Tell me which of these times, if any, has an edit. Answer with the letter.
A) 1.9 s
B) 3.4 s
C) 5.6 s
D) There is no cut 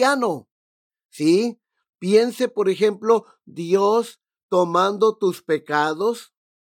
A